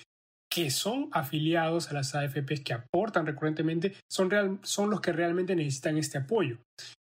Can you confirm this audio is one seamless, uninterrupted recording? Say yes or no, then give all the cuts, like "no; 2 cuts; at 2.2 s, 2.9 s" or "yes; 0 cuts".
yes; 0 cuts